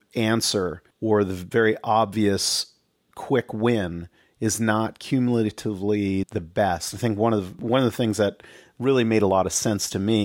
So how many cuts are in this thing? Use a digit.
2